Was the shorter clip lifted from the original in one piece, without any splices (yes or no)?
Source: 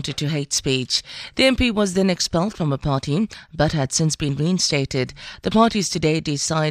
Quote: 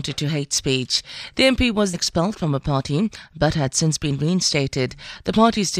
no